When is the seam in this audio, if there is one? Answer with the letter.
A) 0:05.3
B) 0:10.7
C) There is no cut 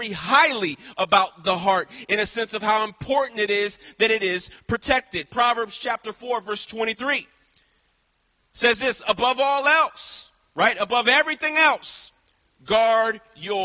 C